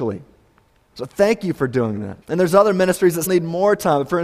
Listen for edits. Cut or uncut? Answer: cut